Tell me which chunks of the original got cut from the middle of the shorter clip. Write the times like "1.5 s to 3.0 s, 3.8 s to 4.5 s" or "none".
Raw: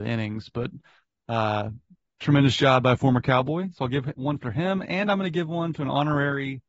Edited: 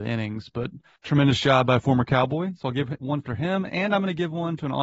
1.0 s to 2.1 s